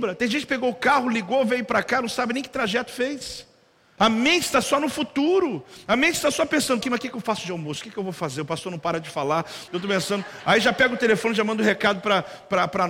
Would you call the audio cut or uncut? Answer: cut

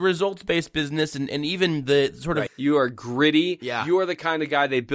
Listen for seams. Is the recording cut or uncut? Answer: cut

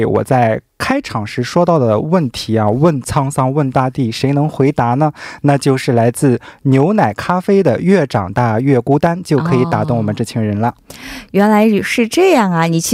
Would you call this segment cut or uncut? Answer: uncut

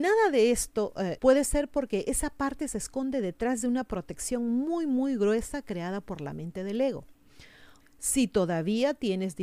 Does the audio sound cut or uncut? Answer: cut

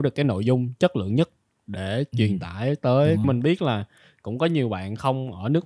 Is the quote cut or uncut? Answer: cut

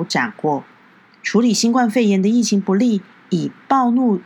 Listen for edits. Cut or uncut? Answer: uncut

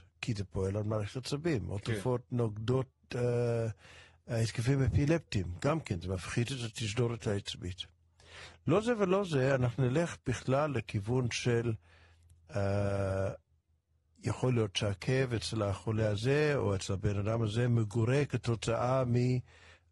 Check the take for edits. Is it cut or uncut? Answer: uncut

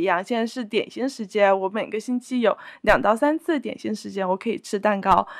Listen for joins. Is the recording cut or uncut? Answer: uncut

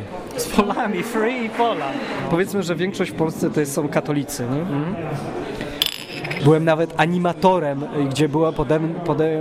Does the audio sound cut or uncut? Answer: cut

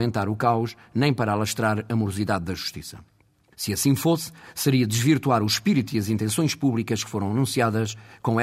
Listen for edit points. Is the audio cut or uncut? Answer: uncut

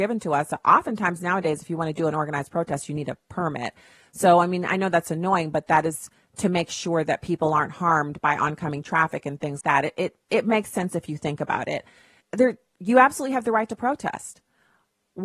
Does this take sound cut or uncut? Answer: cut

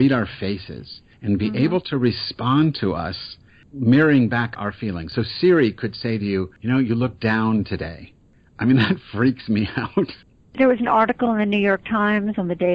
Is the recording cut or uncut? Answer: uncut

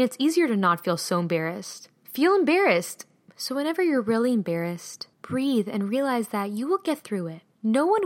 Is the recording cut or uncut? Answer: cut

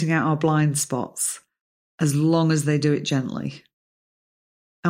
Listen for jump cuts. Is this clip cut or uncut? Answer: uncut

